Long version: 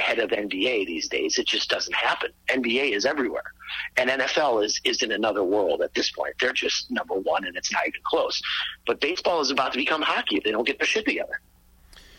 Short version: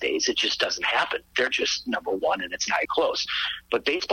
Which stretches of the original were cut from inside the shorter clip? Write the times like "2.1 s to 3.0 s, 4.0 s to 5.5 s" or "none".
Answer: 2.4 s to 6.4 s, 7.9 s to 8.0 s